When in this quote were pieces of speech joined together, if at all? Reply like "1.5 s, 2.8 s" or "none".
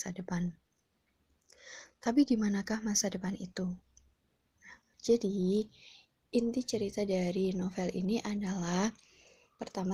4.9 s